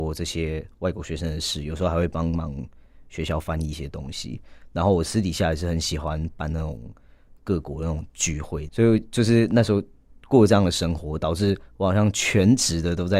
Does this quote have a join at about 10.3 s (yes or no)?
no